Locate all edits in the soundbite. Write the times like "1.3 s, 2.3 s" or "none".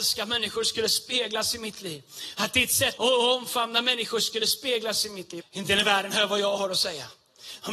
3.0 s, 5.4 s